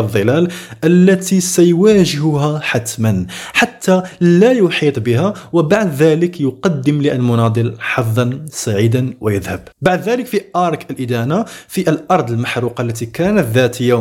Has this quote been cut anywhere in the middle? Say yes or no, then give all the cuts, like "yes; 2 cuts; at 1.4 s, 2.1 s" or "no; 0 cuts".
yes; 1 cut; at 9.7 s